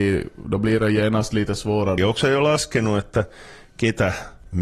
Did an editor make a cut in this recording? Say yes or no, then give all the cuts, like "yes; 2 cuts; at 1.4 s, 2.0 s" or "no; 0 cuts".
yes; 1 cut; at 2.0 s